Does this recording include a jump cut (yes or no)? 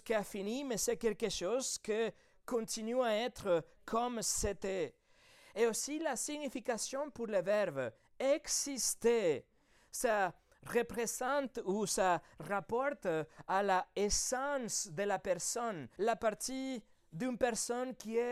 yes